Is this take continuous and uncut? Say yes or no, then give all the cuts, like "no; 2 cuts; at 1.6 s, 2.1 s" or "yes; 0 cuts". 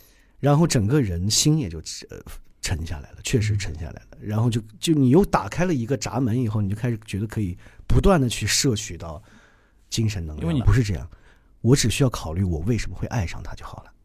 no; 1 cut; at 10.6 s